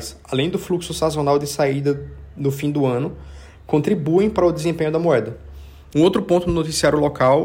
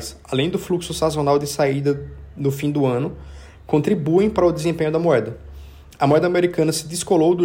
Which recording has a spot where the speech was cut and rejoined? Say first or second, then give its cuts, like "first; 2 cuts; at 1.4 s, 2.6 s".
first; 1 cut; at 5.9 s